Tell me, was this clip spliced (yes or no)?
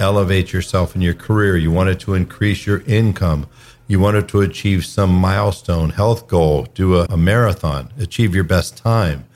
yes